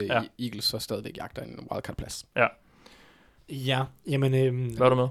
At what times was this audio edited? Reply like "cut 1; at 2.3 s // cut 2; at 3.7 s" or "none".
cut 1; at 3.4 s